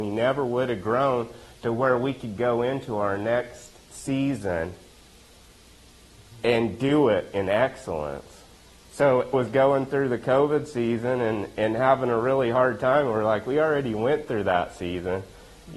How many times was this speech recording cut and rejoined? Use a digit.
1